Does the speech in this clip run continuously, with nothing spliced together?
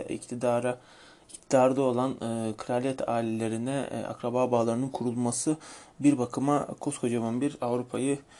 yes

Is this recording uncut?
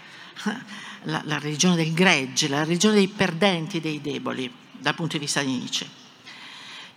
yes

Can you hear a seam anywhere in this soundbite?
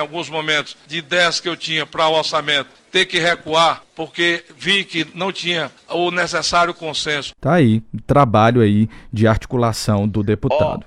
yes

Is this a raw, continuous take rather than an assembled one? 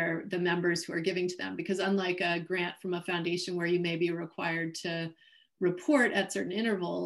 yes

